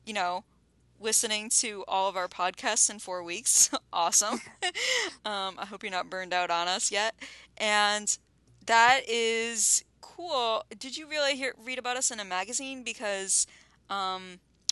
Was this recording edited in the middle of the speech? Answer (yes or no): no